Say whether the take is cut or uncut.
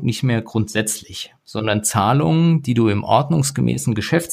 uncut